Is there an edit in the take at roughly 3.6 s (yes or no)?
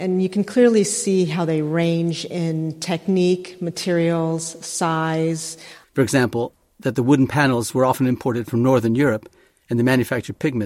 no